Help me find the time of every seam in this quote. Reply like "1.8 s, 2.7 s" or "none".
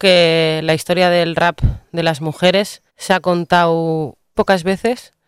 2.9 s, 4.3 s